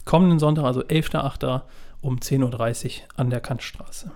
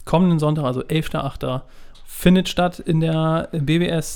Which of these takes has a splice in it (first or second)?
second